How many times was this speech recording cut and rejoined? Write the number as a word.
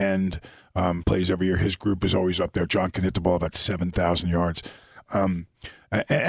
one